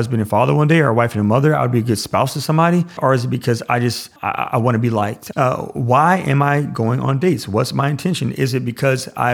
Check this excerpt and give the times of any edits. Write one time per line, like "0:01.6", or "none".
0:03.0
0:04.2
0:05.3